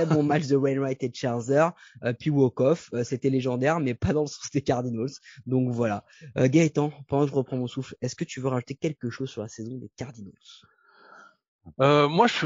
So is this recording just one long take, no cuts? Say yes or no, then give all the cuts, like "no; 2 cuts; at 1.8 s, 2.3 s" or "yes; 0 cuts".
yes; 0 cuts